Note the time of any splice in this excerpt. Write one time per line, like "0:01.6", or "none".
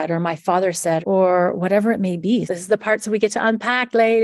0:01.0
0:02.5